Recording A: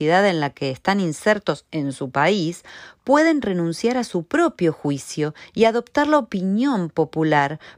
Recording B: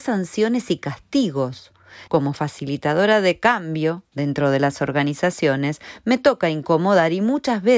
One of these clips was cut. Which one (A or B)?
B